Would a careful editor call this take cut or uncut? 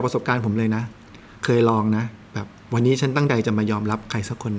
uncut